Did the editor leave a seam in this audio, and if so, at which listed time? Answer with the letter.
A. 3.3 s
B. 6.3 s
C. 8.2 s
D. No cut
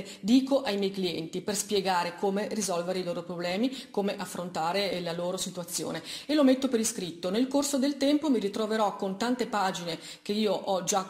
D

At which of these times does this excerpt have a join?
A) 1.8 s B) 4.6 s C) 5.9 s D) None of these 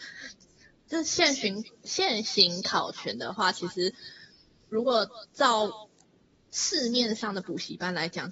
D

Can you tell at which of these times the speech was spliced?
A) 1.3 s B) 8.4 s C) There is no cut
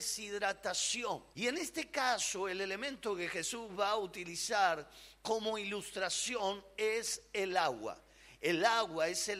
A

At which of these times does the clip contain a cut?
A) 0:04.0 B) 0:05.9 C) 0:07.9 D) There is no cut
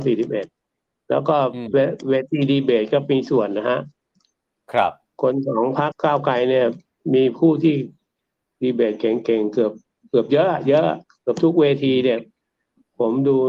B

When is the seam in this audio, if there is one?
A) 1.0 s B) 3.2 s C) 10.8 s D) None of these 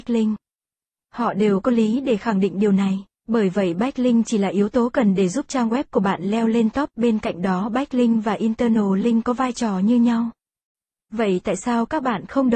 B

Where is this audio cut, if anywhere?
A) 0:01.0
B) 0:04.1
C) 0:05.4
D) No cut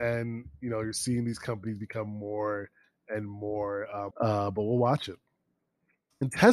B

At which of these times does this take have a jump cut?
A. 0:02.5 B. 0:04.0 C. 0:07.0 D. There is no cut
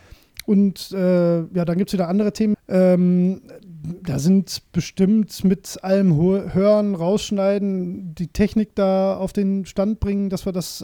A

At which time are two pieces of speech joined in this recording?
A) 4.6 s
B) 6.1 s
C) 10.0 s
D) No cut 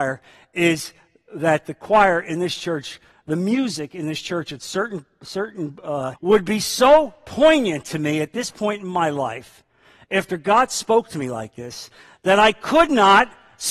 B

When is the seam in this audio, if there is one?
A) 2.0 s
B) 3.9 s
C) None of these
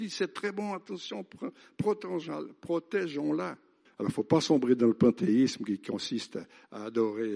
B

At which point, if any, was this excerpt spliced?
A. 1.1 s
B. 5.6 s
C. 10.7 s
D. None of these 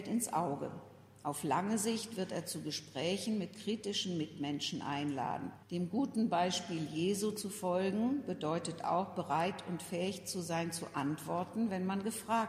B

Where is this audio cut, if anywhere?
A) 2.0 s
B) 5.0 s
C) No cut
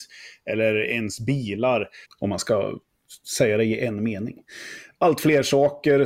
A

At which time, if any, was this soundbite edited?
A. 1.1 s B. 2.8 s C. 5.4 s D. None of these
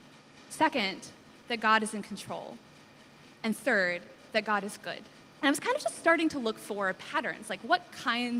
C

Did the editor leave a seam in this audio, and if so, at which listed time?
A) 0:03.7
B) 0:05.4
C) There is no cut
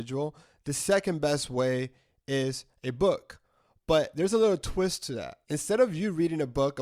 B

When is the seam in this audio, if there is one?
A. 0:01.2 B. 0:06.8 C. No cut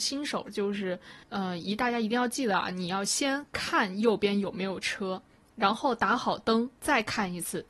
A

